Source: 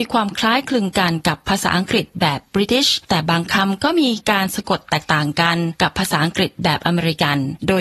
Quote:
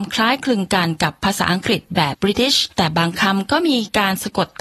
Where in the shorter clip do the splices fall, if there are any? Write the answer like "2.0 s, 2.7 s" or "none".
2.1 s